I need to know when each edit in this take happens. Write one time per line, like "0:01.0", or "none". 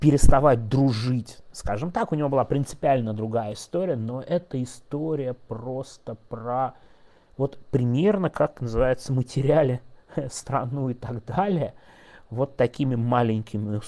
none

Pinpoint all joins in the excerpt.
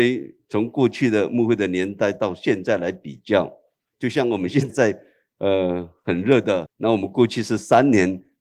0:04.7
0:06.7

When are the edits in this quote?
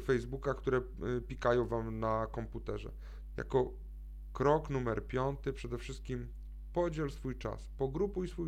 0:03.3

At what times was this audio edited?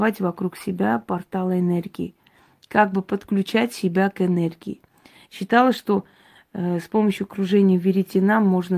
none

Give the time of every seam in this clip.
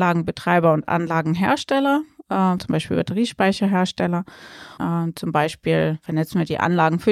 0:02.6
0:04.8

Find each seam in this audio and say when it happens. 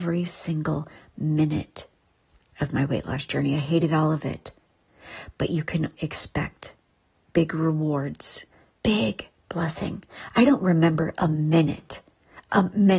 0:05.9
0:08.7

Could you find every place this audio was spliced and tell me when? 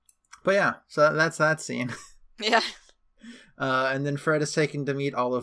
none

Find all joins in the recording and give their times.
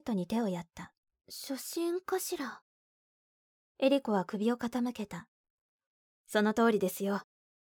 0:01.1

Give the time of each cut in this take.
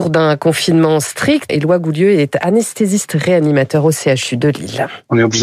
0:01.5

